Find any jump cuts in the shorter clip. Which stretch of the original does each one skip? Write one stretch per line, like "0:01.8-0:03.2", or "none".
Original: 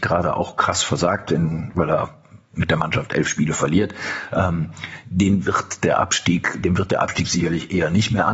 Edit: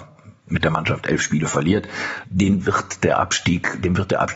0:04.3-0:05.0